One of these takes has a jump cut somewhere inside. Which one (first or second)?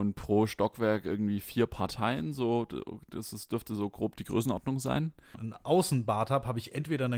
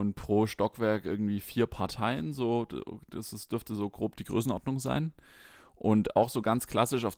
first